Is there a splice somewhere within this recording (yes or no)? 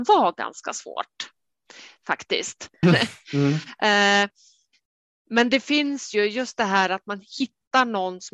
yes